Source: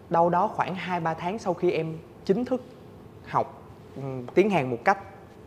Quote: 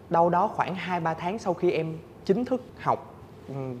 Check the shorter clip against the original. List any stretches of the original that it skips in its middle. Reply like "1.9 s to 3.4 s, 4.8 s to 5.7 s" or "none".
2.7 s to 3.2 s